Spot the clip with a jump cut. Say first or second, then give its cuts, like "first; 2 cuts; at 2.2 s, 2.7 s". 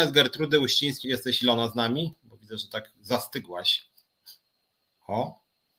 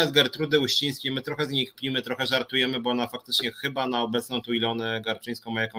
first; 1 cut; at 1.0 s